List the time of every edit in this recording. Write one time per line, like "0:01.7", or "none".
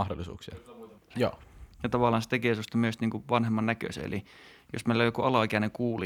0:01.1